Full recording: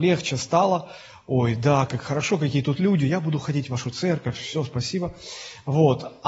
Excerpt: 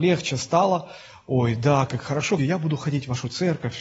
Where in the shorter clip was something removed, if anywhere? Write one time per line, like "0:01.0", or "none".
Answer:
0:02.4